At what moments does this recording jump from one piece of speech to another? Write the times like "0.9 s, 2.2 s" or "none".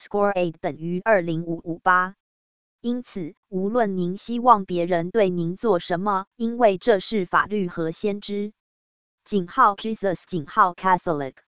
6.3 s